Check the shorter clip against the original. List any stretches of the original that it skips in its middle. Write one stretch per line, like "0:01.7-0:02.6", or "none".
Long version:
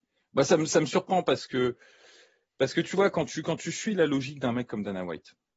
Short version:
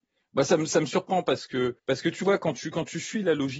0:01.8-0:02.5